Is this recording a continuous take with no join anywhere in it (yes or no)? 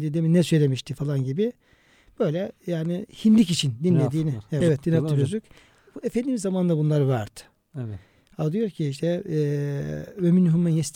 no